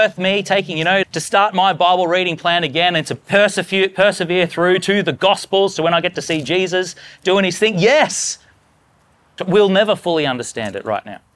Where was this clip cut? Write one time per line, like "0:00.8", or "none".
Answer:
0:01.0
0:09.4